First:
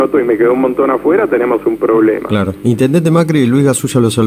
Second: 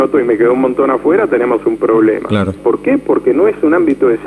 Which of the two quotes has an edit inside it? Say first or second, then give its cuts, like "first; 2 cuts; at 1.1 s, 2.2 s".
second; 1 cut; at 2.6 s